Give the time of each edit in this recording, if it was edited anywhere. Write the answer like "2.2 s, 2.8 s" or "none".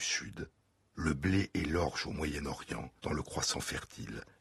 3.0 s